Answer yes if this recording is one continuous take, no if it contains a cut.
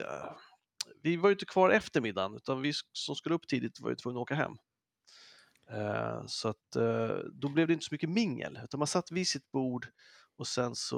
yes